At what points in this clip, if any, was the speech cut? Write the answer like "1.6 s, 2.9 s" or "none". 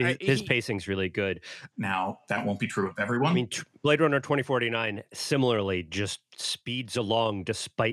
1.7 s